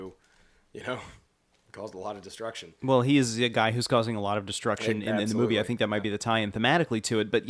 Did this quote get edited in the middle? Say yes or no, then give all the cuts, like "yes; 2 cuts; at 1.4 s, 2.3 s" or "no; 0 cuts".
no; 0 cuts